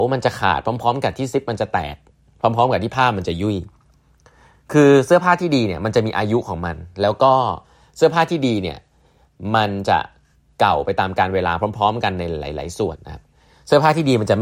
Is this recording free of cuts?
no; 1 cut; at 13.0 s

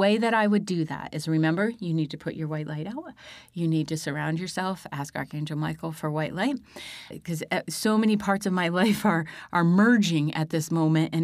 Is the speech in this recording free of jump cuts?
no; 1 cut; at 7.1 s

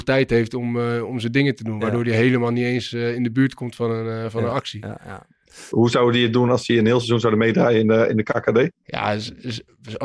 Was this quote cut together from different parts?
yes; 1 cut; at 5.7 s

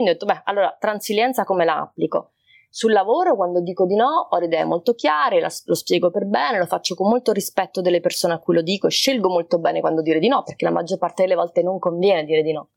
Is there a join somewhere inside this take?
no; 0 cuts

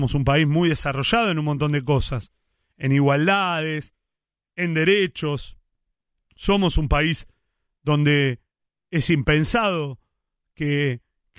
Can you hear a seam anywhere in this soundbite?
no; 0 cuts

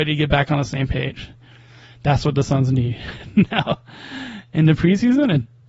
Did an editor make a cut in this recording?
no; 0 cuts

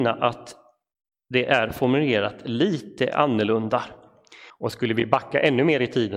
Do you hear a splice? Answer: yes; 1 cut; at 4.5 s

